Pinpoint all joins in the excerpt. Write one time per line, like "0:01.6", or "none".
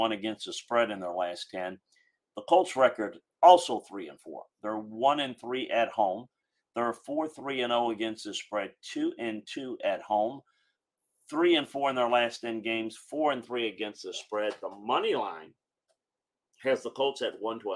none